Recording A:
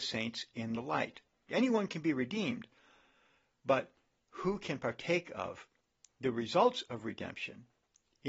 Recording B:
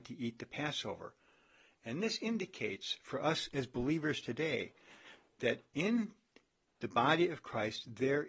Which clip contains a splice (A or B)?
A